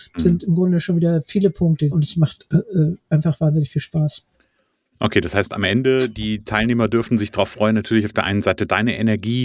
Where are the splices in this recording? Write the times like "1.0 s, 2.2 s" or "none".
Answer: 1.9 s